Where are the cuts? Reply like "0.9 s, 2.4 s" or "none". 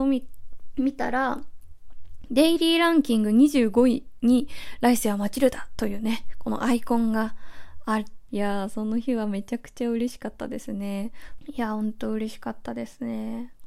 8.3 s, 11.4 s